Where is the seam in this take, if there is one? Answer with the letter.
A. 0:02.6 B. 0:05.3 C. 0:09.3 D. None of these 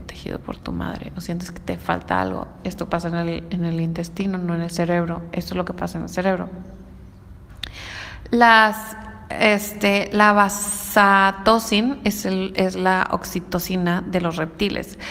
A